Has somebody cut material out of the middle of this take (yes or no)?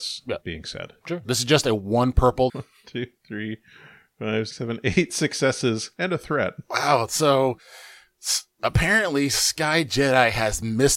yes